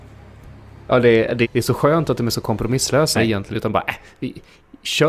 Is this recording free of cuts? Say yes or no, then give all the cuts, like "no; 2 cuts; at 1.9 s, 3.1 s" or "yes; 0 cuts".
no; 2 cuts; at 1.4 s, 3.1 s